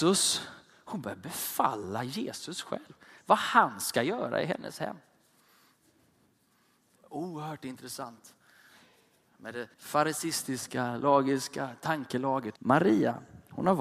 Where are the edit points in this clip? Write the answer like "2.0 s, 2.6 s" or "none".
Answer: 9.7 s, 12.6 s